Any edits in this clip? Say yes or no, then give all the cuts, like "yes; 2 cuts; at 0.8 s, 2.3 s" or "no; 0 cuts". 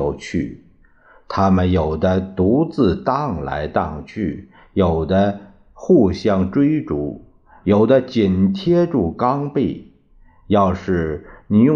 no; 0 cuts